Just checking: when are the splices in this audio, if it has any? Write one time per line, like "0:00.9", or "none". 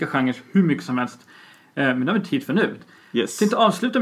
0:02.8